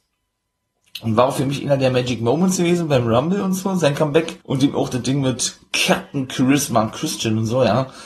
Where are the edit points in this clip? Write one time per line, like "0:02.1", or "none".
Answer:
0:04.4

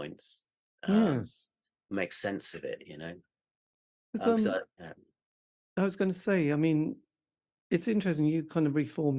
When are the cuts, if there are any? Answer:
0:04.7

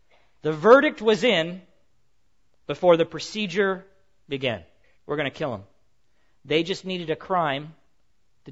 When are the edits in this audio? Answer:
0:04.9

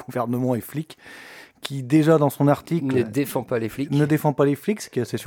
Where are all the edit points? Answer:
none

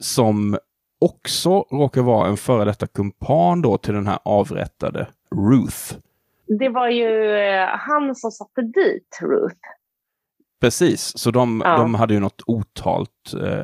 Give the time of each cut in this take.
none

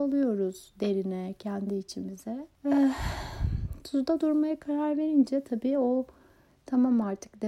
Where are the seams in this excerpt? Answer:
0:02.5

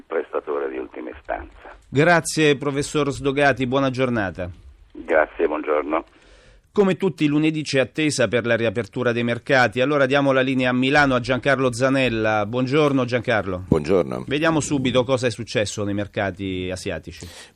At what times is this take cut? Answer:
none

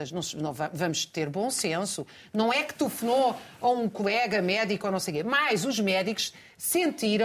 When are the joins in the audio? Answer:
none

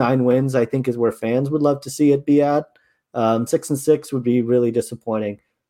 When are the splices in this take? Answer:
0:03.5

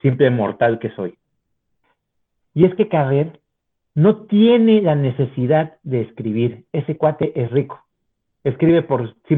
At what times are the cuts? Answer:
0:02.4

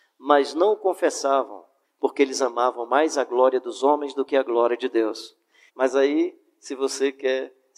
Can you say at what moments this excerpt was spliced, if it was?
0:01.8
0:05.7

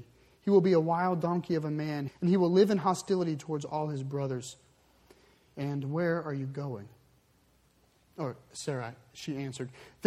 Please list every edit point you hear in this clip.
0:02.1
0:05.5
0:08.0

